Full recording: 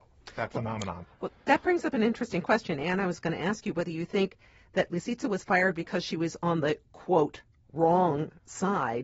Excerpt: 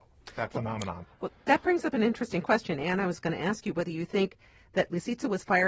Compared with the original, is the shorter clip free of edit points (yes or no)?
yes